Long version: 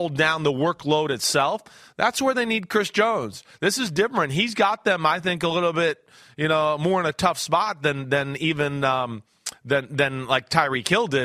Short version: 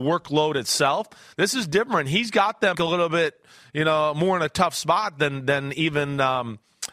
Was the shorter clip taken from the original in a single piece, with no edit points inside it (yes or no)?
no